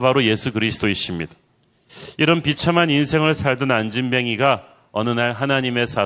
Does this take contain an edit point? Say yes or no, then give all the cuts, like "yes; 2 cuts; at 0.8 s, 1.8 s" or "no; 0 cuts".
no; 0 cuts